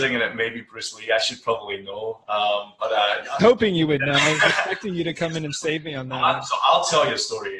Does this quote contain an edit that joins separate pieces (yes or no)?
yes